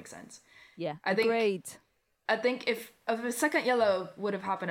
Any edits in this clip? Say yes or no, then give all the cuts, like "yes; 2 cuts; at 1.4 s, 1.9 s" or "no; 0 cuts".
no; 0 cuts